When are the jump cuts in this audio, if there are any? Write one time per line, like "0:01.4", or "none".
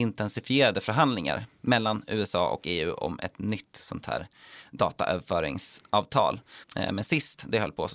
0:06.6